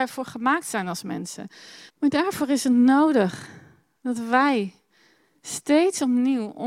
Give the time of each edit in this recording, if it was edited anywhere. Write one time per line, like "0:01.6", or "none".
0:01.9